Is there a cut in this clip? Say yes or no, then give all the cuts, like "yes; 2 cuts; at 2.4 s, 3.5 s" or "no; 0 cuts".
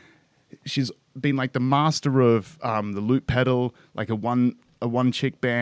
no; 0 cuts